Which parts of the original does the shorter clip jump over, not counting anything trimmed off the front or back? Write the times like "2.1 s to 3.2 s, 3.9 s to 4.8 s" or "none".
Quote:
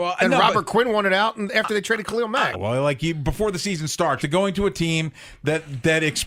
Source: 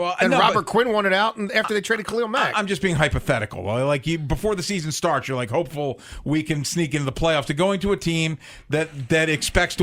2.5 s to 3.6 s, 5.2 s to 7.4 s